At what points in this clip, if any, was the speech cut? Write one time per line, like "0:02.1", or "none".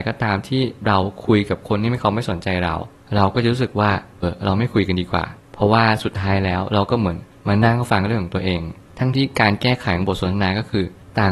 0:04.2
0:09.1